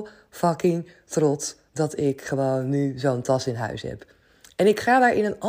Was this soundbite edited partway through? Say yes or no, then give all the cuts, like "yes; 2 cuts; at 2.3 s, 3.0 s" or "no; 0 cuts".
no; 0 cuts